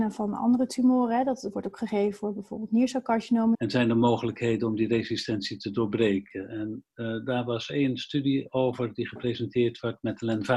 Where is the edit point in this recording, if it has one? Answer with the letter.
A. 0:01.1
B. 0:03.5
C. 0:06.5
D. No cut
B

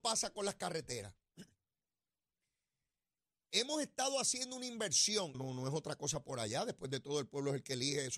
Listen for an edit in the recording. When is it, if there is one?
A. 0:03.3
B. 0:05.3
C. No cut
B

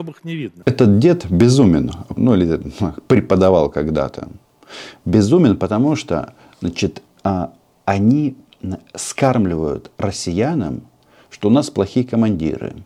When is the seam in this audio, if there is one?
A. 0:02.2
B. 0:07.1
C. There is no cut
A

